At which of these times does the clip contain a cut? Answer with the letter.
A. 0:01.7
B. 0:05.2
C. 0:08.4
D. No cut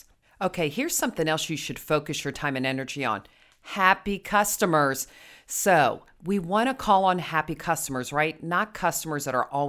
D